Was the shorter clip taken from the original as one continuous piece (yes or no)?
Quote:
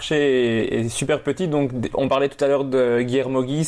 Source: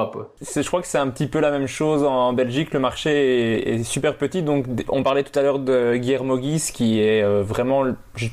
yes